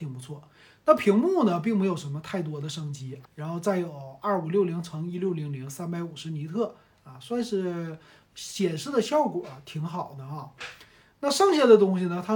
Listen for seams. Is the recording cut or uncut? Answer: cut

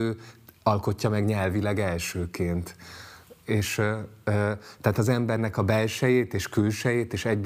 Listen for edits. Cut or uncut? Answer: uncut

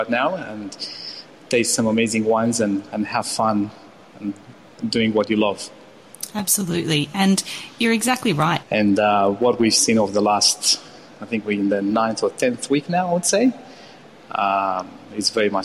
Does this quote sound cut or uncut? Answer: cut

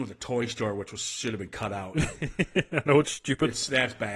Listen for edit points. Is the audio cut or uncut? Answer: uncut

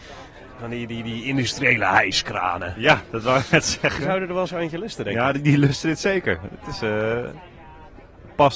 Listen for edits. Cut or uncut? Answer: cut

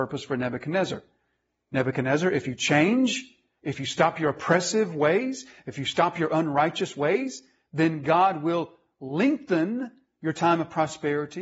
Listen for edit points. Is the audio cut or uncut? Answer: uncut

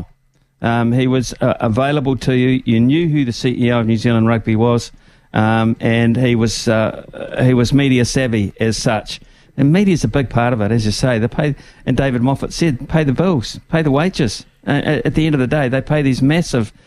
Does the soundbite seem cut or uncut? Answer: uncut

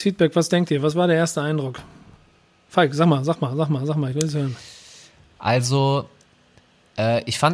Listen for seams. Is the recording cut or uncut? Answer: uncut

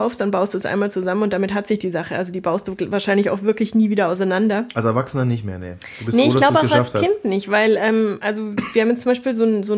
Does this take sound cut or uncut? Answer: uncut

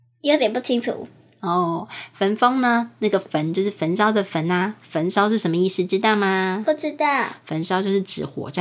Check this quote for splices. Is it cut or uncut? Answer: uncut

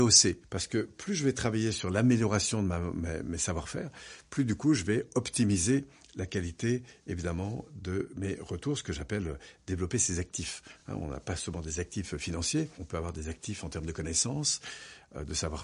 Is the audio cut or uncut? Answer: uncut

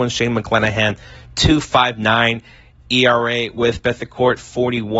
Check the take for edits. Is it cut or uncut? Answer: uncut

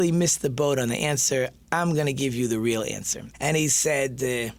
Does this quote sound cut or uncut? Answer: cut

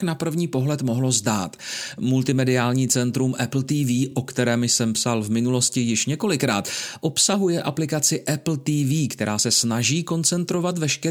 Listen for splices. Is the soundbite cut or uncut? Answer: uncut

